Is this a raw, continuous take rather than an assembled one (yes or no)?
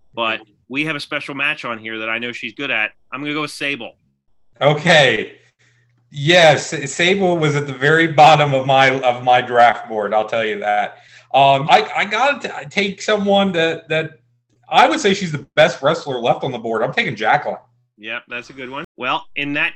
no